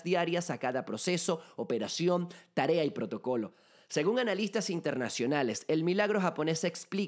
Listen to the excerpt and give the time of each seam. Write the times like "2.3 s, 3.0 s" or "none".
none